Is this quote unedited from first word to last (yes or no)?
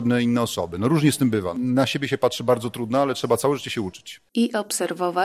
yes